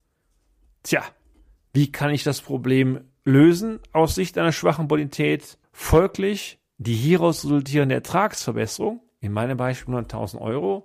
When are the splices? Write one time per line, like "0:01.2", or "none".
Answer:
0:05.6

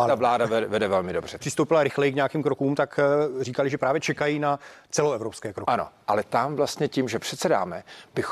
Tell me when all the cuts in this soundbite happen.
0:01.4

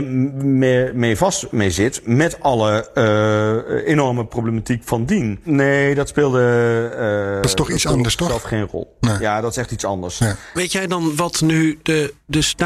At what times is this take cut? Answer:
0:05.5
0:10.5

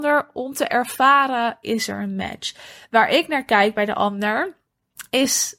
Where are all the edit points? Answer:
0:01.6

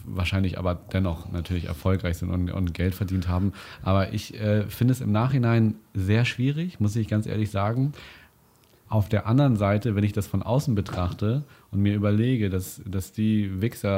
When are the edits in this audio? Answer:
none

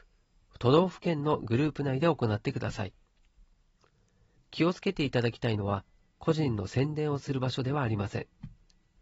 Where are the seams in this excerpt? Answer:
0:06.0

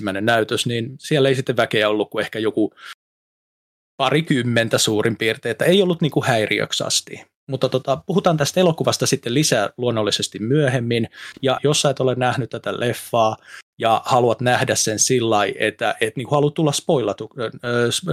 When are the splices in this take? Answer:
0:11.6

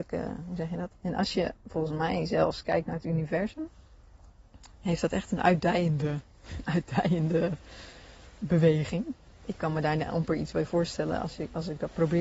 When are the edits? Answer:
0:00.9

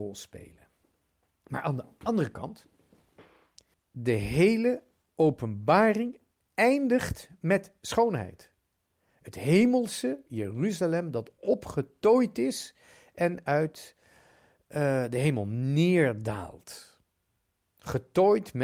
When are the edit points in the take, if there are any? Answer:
0:03.7

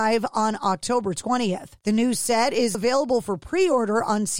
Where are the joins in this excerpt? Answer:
0:02.7

